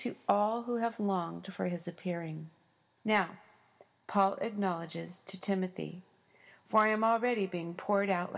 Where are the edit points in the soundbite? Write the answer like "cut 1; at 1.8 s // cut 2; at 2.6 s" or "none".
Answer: cut 1; at 3.0 s